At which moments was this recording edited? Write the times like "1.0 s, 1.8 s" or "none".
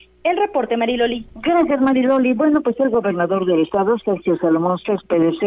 1.3 s

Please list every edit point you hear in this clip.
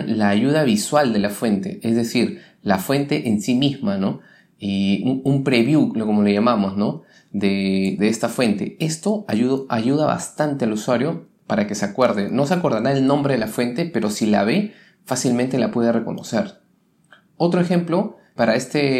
none

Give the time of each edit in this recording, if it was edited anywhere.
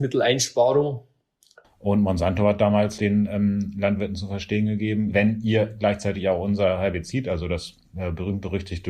1.6 s, 3.0 s, 5.1 s

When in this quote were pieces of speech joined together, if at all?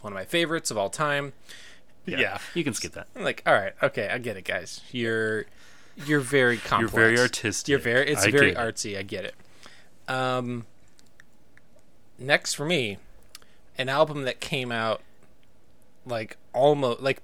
2.0 s

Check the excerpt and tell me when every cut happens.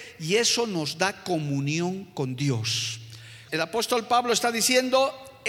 3.5 s

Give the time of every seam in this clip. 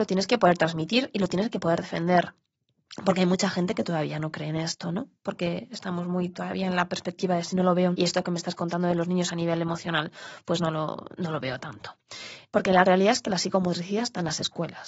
7.9 s, 12.5 s

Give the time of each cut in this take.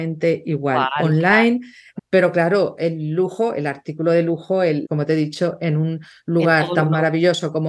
2.0 s, 4.8 s

